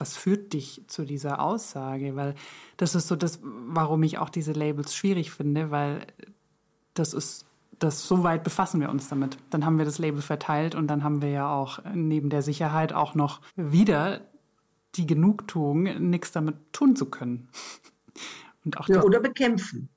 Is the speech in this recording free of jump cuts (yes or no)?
no